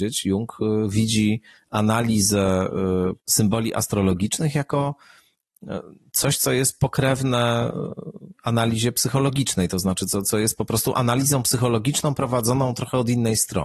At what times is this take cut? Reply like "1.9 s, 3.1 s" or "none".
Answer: 3.2 s